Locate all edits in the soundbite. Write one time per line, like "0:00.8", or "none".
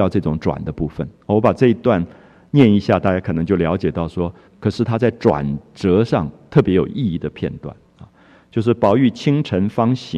0:04.5